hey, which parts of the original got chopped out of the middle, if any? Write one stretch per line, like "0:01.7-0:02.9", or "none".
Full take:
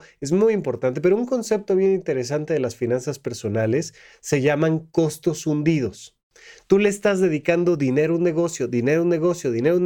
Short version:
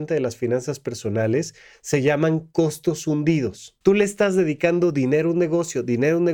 0:06.2-0:06.7